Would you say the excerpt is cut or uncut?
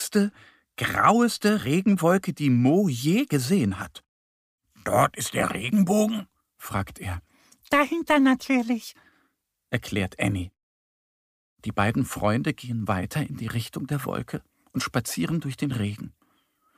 uncut